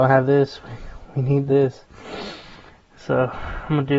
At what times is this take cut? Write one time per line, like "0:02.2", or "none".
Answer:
none